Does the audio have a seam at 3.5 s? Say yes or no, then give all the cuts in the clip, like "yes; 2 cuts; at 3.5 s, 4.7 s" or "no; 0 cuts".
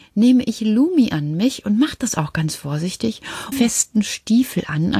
yes; 1 cut; at 3.5 s